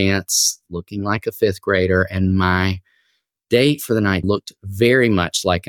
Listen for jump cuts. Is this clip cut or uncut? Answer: cut